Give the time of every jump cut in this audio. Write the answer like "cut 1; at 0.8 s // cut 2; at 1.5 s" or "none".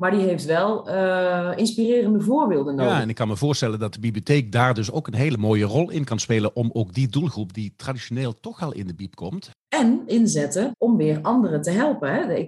cut 1; at 9.5 s // cut 2; at 10.7 s